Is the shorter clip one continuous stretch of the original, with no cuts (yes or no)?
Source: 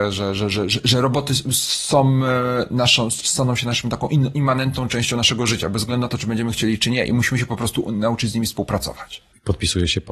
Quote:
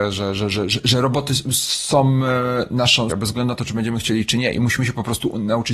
no